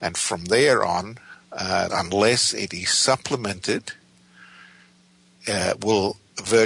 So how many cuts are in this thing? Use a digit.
1